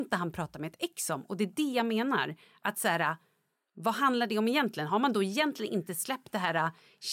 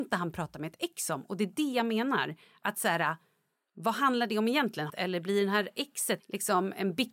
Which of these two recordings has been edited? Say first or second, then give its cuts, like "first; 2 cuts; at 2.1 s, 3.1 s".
second; 2 cuts; at 4.9 s, 6.2 s